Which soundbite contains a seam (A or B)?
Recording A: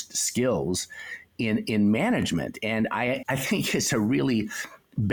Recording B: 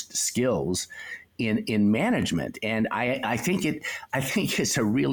A